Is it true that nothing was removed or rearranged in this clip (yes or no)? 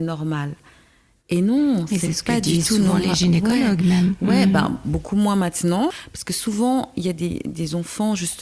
yes